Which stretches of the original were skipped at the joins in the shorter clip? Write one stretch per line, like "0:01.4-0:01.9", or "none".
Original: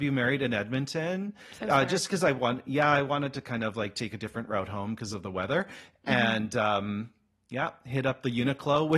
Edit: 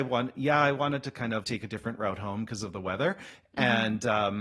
0:03.7-0:03.9